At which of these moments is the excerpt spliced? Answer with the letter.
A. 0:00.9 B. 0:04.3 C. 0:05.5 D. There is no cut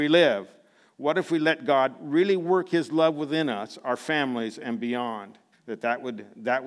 C